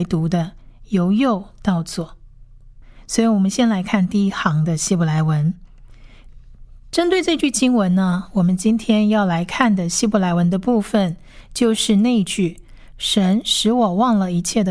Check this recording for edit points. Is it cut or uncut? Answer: cut